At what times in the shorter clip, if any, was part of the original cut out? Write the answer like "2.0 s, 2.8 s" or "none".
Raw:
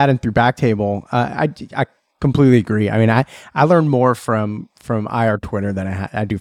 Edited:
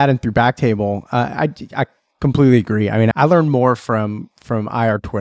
3.1 s